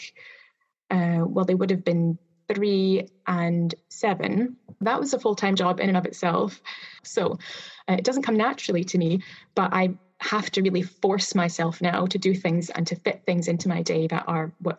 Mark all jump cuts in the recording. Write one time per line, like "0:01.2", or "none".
0:07.0